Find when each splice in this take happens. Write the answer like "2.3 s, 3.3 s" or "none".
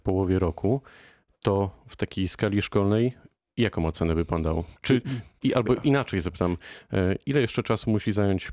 4.8 s